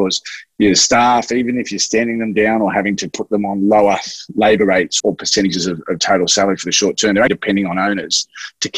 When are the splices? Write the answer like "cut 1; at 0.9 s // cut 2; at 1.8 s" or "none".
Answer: cut 1; at 5.0 s // cut 2; at 7.3 s